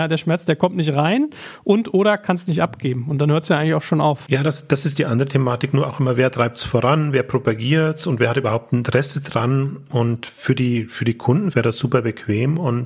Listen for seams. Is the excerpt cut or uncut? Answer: cut